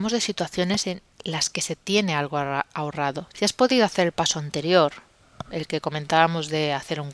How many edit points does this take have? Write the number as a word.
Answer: one